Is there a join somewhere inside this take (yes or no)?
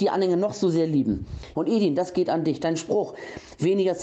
yes